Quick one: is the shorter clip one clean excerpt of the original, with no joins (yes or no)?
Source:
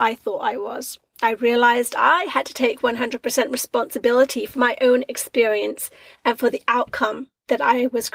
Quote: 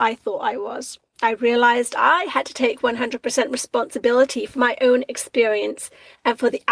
yes